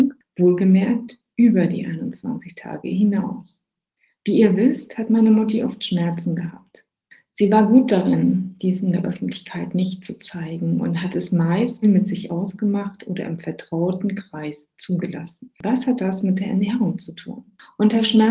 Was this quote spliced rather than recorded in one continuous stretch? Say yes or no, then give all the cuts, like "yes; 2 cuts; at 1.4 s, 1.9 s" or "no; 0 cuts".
yes; 2 cuts; at 11.8 s, 15.5 s